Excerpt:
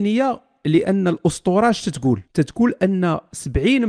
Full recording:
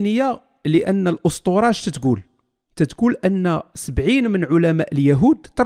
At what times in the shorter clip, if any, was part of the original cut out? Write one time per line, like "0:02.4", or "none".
0:02.2